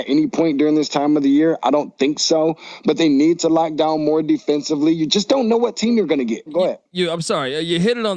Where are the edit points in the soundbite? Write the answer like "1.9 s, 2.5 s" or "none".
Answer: 6.5 s

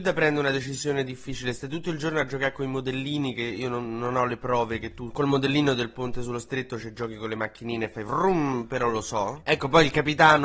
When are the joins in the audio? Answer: 9.4 s

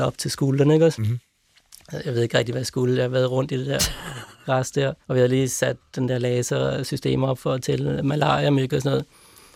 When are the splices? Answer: 5.0 s

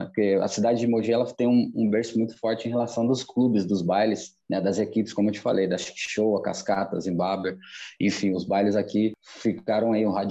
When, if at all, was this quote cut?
1.7 s

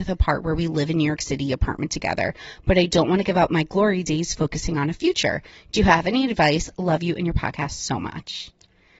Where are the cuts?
none

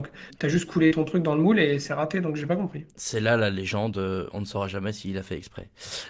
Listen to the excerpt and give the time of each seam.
none

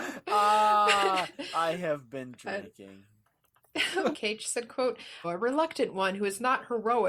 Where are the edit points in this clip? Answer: 4.1 s, 5.2 s

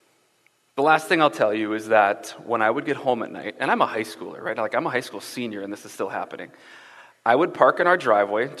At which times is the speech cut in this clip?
none

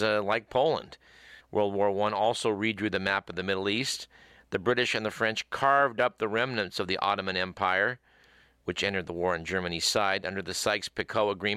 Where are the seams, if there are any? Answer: 1.4 s

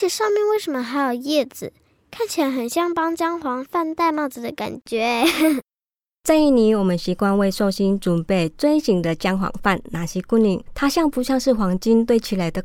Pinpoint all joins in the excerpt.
10.7 s

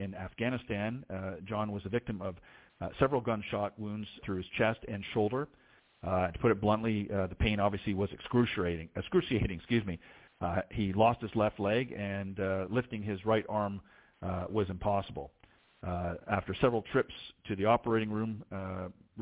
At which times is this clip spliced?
4.2 s

